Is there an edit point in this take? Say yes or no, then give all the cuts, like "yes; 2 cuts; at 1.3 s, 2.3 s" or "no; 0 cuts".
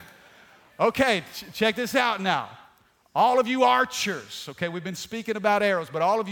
no; 0 cuts